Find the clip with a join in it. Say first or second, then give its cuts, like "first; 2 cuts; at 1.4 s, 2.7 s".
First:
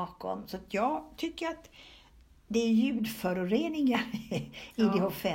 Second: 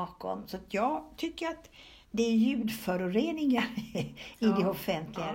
second; 1 cut; at 2.0 s